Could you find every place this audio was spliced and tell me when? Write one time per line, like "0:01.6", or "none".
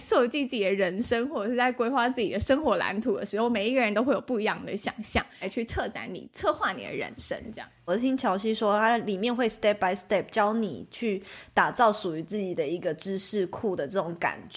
0:05.4
0:07.9